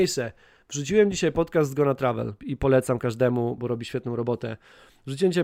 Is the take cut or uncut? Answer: cut